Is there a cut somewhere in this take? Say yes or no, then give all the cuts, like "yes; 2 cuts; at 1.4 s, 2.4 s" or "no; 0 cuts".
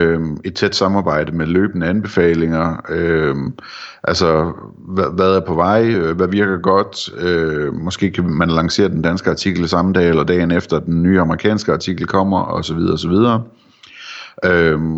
no; 0 cuts